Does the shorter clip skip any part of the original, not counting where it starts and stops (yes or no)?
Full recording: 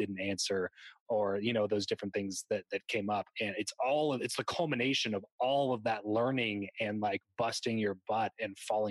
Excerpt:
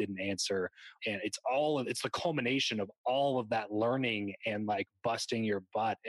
yes